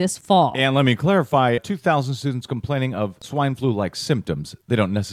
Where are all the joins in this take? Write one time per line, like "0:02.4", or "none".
0:01.6